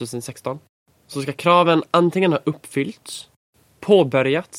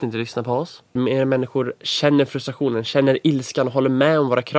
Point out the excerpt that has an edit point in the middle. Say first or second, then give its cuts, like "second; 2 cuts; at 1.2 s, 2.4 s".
second; 1 cut; at 1.0 s